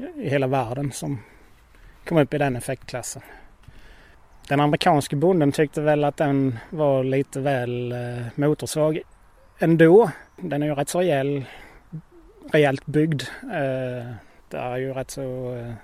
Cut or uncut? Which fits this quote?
uncut